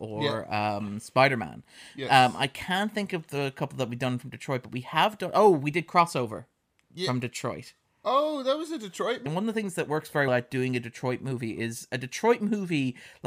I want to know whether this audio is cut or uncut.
cut